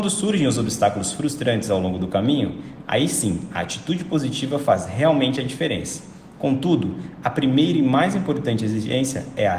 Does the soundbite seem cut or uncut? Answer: uncut